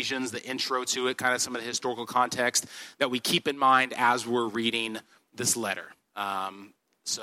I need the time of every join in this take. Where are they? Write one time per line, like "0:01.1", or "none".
none

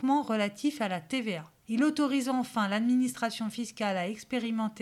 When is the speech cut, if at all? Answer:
0:01.6

